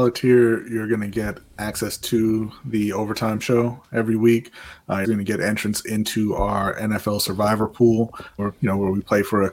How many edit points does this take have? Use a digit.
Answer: 2